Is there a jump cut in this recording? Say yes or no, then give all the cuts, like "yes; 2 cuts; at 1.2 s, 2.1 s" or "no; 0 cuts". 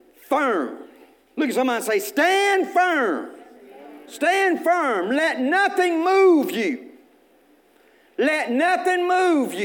no; 0 cuts